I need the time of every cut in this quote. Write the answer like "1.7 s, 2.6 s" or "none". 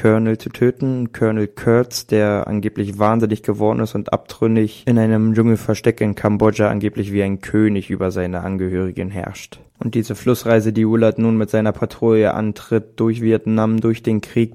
none